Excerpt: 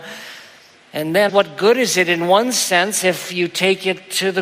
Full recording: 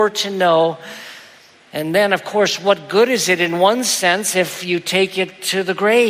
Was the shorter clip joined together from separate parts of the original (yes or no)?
yes